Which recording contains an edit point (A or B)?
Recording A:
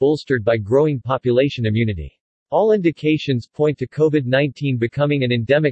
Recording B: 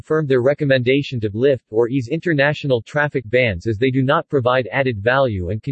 A